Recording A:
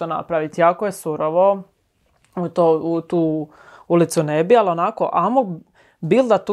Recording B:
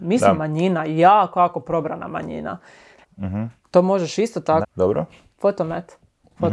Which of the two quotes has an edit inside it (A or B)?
B